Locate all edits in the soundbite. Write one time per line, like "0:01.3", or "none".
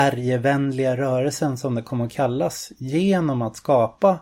none